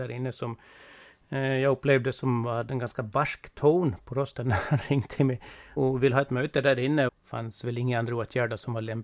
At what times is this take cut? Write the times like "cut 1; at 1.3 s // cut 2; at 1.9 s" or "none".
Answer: cut 1; at 5.8 s // cut 2; at 7.1 s